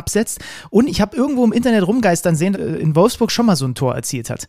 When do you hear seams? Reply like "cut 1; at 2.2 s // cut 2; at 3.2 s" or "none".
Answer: cut 1; at 2.5 s